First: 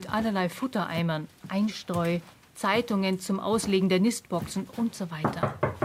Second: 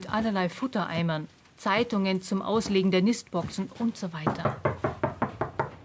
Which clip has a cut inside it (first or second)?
second